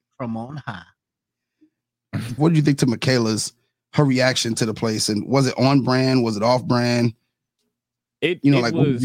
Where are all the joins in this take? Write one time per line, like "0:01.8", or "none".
0:02.4